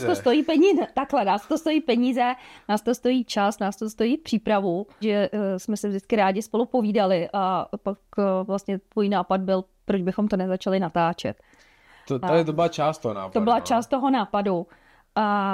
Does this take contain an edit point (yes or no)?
yes